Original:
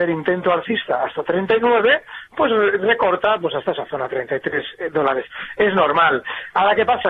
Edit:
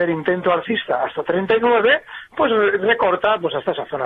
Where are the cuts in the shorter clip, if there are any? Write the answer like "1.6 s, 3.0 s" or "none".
none